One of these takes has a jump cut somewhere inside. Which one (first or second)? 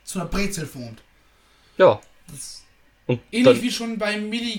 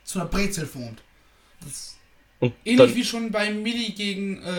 second